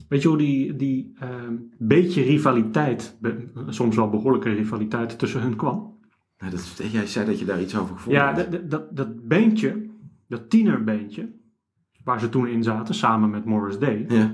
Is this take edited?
yes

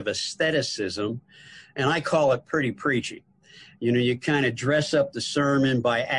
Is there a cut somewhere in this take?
no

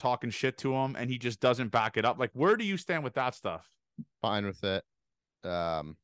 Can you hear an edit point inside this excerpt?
no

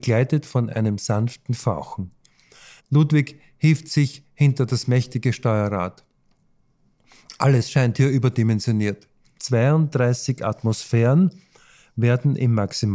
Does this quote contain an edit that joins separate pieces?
yes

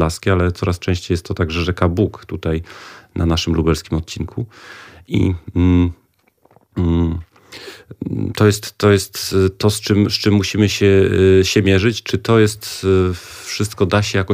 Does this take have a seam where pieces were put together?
no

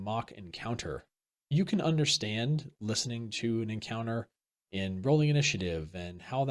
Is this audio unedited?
no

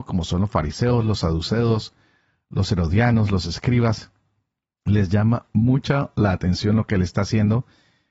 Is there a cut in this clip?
yes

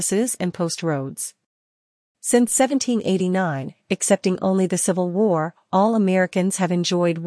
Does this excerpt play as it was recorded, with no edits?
yes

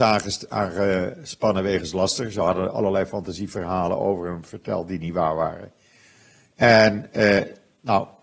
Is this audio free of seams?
yes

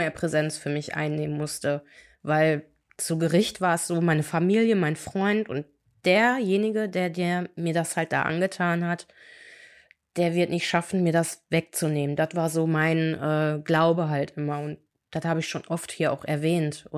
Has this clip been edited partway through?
no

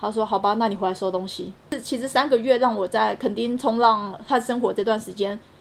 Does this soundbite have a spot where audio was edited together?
no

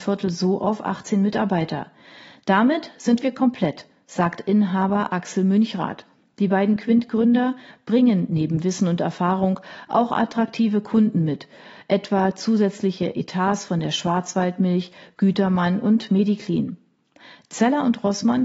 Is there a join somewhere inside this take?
no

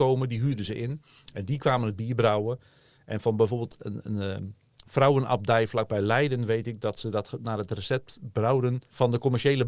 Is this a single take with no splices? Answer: yes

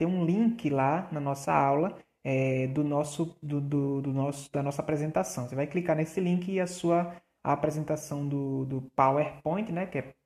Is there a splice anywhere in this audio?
no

